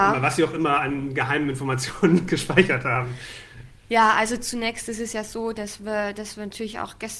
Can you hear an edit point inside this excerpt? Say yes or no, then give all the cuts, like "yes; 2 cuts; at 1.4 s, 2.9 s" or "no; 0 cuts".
no; 0 cuts